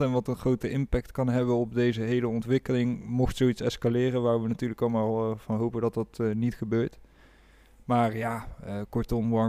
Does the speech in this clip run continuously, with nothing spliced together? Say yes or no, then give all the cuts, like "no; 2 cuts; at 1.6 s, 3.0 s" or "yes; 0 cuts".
yes; 0 cuts